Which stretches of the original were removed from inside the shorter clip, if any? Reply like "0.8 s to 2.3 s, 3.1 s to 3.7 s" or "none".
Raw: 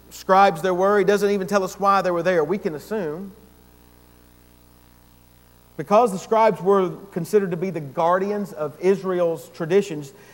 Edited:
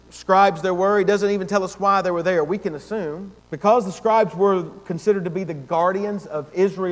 3.4 s to 5.7 s